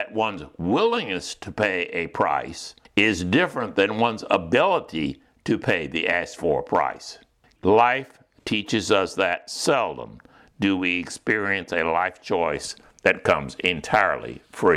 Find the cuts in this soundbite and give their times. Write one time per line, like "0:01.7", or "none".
0:07.6